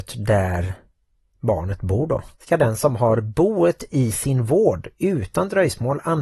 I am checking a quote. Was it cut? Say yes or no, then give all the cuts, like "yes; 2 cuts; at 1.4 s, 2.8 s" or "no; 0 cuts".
yes; 1 cut; at 2.3 s